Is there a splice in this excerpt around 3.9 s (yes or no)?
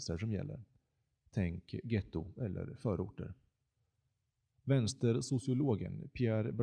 no